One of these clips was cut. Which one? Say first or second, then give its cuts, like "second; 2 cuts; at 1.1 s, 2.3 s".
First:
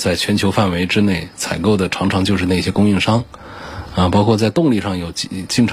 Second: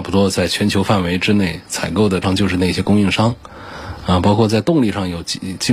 second; 1 cut; at 2.2 s